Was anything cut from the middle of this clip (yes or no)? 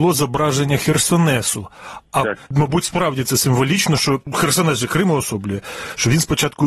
yes